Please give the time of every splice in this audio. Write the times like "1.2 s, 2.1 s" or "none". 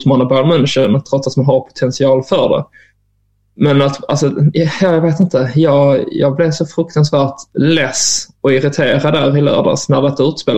none